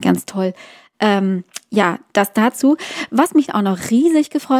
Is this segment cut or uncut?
uncut